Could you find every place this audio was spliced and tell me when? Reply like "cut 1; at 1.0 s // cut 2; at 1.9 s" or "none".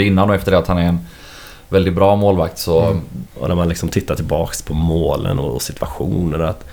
cut 1; at 3.3 s